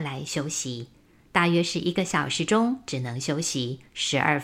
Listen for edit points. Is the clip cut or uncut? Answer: uncut